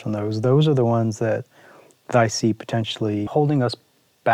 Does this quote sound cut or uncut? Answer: cut